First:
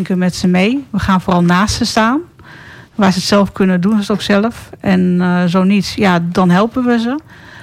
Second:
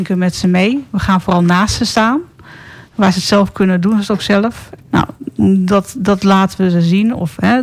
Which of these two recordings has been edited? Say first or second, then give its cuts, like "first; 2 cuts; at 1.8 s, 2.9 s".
second; 1 cut; at 4.8 s